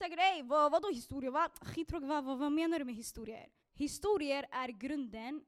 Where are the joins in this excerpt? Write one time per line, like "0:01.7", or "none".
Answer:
0:03.6